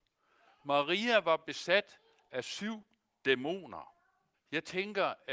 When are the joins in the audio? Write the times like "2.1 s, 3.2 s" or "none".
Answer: 4.3 s